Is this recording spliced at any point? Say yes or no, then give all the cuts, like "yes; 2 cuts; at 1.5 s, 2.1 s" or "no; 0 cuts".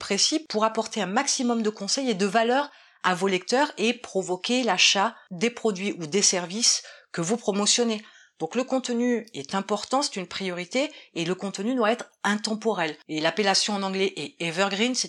no; 0 cuts